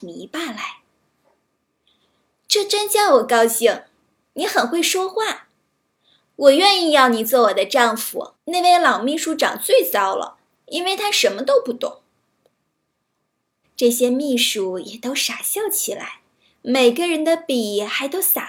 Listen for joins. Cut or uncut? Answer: cut